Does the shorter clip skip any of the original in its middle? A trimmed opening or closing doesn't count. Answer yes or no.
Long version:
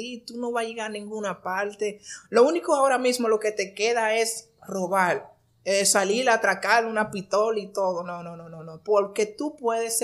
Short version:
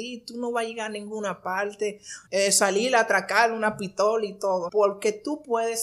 yes